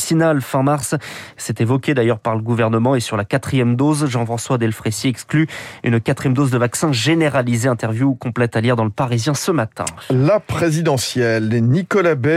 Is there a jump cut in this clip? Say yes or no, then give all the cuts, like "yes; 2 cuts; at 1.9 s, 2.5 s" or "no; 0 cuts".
no; 0 cuts